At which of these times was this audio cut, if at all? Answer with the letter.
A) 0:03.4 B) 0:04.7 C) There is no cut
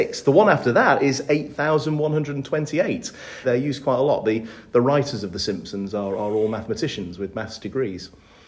A